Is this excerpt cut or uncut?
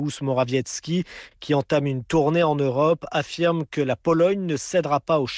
uncut